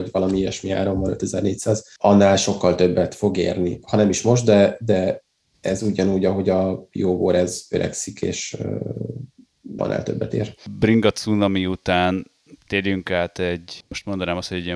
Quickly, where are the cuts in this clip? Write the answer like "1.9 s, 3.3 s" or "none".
9.8 s